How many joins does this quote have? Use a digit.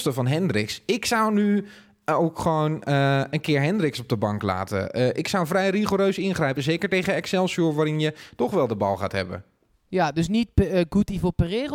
0